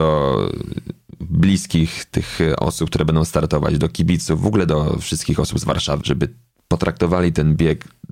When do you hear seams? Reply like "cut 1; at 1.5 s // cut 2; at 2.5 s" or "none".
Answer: cut 1; at 6.0 s